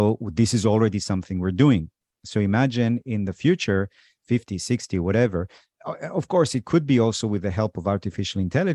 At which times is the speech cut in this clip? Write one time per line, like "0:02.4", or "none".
none